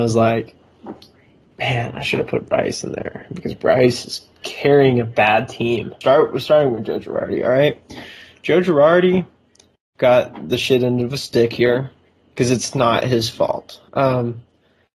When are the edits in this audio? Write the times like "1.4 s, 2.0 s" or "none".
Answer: 6.0 s, 13.9 s